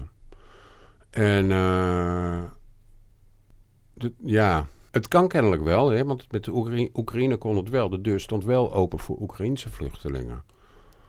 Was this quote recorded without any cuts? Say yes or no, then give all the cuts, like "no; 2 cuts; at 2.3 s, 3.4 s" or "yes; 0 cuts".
no; 1 cut; at 4.9 s